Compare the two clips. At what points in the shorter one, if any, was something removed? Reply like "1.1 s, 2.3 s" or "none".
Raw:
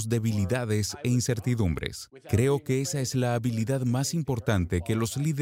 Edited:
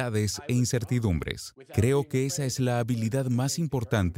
none